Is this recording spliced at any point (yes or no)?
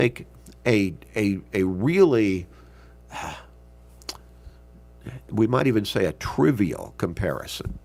no